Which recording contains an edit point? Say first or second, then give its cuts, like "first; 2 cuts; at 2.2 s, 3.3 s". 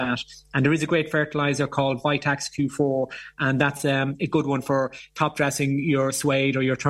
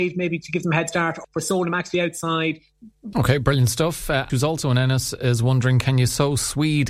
second; 3 cuts; at 1.2 s, 3.1 s, 4.3 s